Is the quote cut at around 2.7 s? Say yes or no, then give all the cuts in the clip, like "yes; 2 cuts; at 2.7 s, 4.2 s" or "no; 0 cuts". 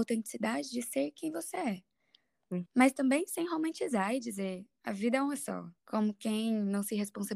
yes; 2 cuts; at 2.7 s, 5.8 s